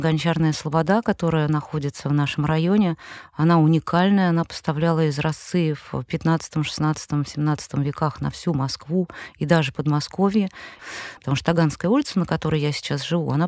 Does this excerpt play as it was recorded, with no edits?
no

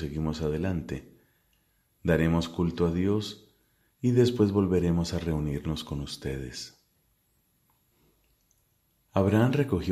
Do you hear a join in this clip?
no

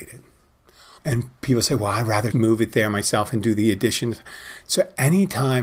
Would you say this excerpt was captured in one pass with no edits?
no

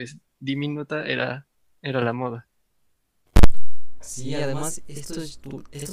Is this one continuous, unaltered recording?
yes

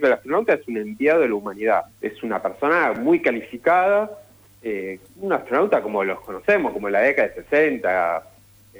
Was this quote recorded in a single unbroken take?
no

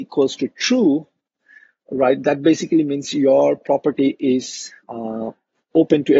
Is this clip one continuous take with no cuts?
yes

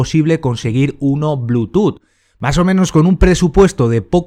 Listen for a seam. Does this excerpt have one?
no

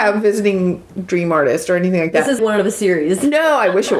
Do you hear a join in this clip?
yes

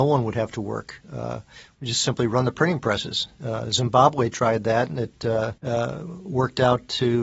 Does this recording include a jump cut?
yes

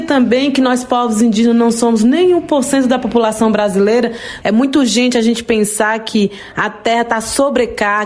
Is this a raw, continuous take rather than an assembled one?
no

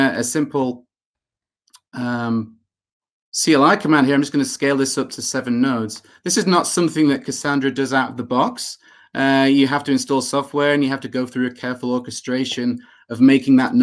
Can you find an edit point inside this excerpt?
no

